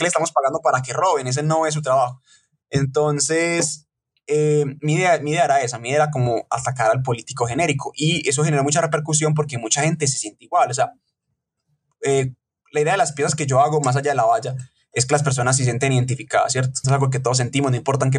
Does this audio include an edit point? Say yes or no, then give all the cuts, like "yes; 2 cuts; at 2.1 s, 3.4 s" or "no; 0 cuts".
yes; 1 cut; at 16.8 s